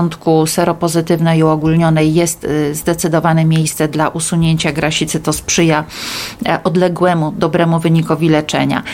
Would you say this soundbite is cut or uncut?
uncut